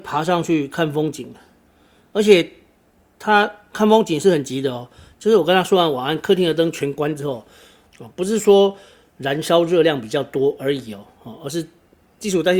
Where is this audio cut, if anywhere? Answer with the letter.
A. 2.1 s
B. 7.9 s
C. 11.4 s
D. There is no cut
B